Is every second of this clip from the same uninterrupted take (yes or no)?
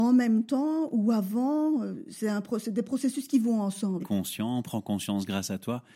no